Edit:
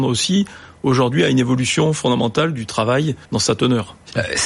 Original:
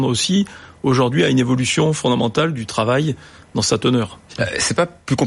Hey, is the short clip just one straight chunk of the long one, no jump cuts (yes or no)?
no